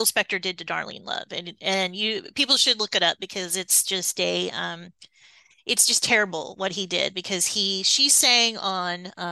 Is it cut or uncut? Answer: uncut